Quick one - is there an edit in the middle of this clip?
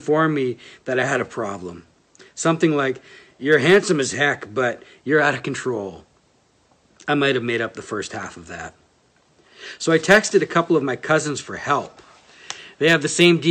no; 0 cuts

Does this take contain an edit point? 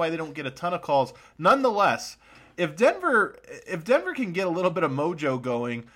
no; 0 cuts

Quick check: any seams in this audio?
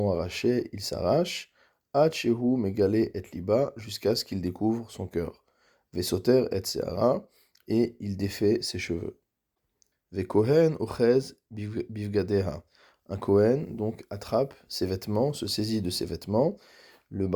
yes; 1 cut; at 9.9 s

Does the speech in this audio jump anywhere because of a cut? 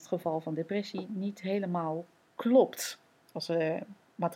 yes; 1 cut; at 3.2 s

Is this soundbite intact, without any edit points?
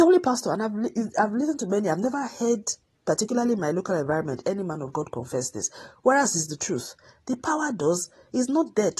yes; 0 cuts

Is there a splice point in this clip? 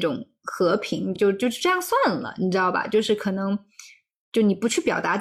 no; 0 cuts

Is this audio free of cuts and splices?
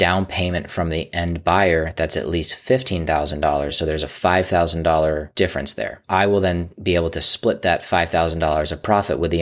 yes; 0 cuts

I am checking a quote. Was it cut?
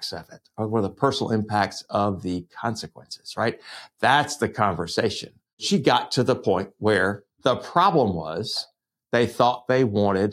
no; 0 cuts

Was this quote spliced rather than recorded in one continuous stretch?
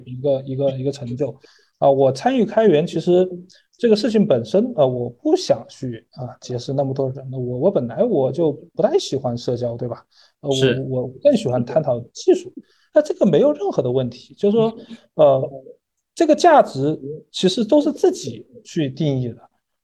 no; 0 cuts

